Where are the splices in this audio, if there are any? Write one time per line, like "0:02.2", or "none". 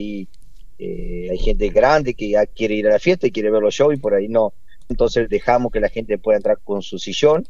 0:04.9
0:06.6